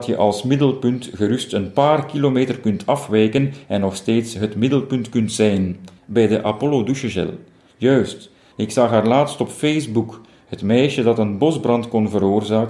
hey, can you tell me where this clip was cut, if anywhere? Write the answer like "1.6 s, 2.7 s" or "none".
6.0 s, 8.5 s